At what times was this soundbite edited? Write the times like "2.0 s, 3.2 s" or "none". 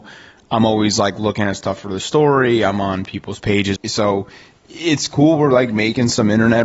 3.8 s